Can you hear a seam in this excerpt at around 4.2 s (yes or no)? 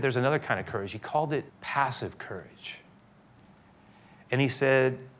no